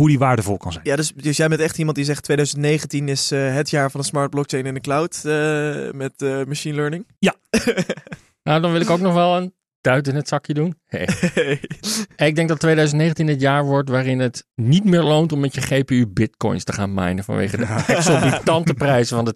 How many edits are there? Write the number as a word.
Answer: zero